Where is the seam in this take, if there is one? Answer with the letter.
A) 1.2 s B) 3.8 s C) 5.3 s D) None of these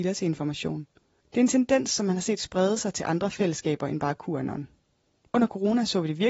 A